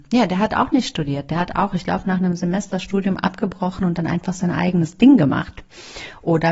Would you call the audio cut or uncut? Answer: uncut